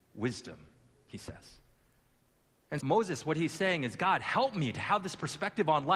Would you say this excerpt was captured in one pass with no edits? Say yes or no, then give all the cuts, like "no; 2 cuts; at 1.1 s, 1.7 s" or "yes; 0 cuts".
no; 1 cut; at 2.8 s